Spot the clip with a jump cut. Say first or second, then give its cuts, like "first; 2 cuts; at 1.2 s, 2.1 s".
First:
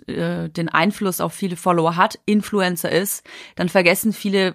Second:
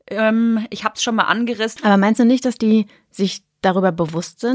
second; 1 cut; at 1.8 s